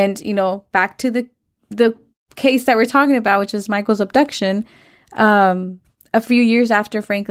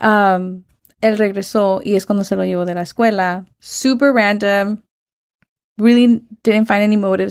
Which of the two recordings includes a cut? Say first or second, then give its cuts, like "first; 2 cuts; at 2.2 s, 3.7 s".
second; 1 cut; at 0.9 s